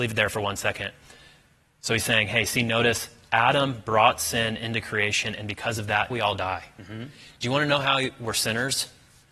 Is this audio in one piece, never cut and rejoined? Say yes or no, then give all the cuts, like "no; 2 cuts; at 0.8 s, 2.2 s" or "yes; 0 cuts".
no; 1 cut; at 6.1 s